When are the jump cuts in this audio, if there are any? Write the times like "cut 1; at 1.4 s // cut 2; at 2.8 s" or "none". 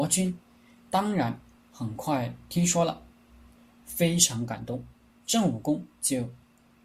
cut 1; at 5.1 s